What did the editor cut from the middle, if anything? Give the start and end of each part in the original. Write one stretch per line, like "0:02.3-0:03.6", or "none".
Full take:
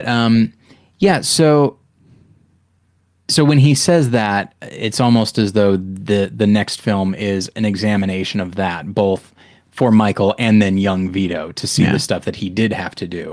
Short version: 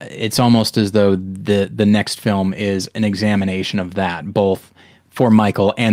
none